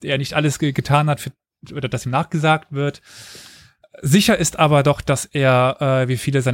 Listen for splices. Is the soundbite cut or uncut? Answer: uncut